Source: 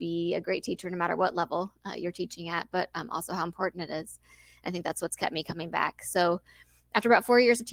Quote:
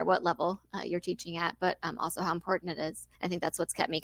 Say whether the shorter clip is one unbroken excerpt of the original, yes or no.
no